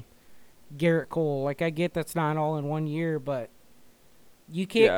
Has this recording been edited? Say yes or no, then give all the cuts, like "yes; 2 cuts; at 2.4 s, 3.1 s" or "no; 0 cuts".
no; 0 cuts